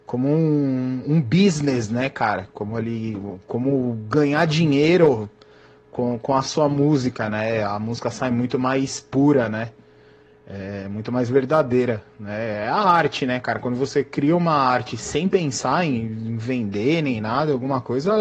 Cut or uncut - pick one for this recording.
uncut